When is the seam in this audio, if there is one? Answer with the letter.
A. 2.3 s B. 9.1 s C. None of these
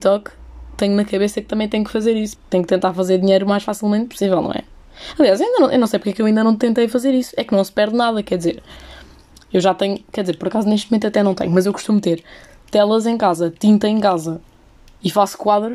A